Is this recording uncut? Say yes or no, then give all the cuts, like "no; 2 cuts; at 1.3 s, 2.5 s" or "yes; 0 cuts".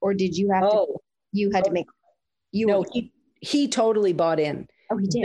yes; 0 cuts